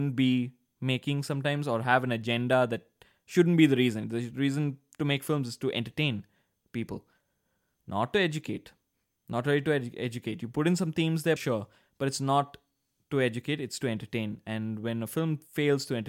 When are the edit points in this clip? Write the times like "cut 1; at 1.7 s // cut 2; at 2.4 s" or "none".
cut 1; at 11.4 s